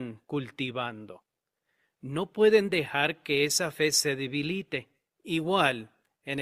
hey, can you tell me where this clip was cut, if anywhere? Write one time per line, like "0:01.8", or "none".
0:05.1